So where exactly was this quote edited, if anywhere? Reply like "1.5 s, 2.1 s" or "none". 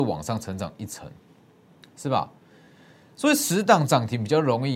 none